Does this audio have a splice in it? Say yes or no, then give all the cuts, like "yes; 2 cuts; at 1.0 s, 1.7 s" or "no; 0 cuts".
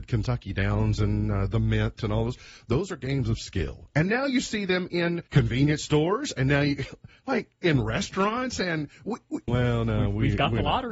yes; 2 cuts; at 5.3 s, 9.5 s